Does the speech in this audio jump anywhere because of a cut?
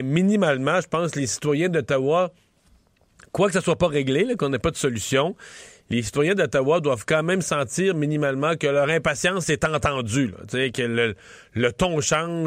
no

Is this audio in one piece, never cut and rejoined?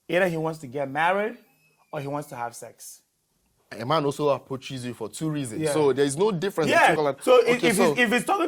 no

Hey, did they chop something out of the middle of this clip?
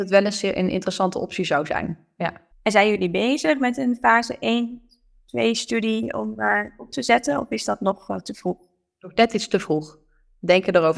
yes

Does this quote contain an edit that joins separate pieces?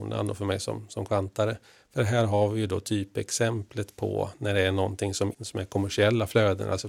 yes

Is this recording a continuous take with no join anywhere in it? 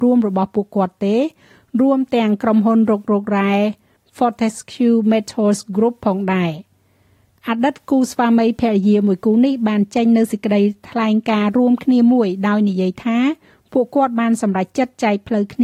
yes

